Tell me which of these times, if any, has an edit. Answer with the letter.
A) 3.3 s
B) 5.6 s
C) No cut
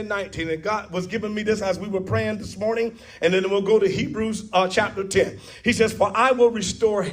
C